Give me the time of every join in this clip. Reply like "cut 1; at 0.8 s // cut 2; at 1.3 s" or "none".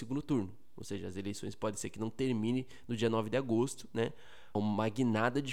cut 1; at 4.6 s

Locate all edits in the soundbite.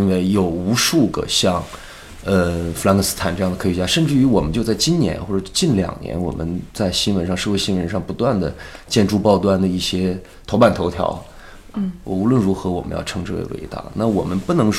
cut 1; at 11.7 s

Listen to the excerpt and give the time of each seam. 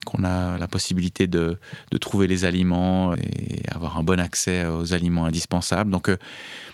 cut 1; at 3.1 s

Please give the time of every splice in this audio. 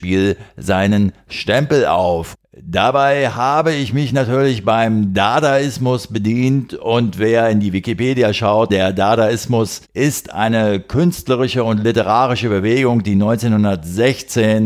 cut 1; at 2.3 s // cut 2; at 8.7 s // cut 3; at 9.8 s

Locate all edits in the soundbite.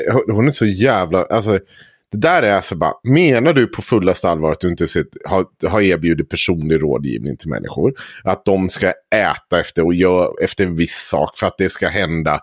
none

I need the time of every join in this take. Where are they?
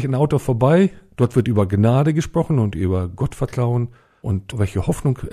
none

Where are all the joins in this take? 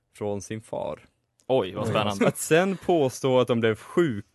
cut 1; at 2.2 s

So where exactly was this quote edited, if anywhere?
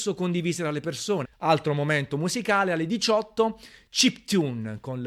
cut 1; at 1.2 s

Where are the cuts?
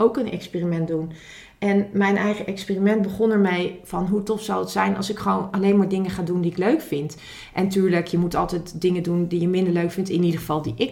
none

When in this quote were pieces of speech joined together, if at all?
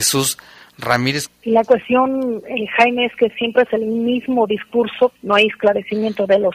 cut 1; at 1.3 s // cut 2; at 5.2 s

